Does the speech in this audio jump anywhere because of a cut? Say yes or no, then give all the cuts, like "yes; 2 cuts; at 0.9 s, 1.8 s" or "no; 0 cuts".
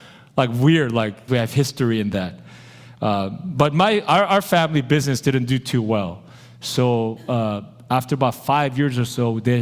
yes; 1 cut; at 1.3 s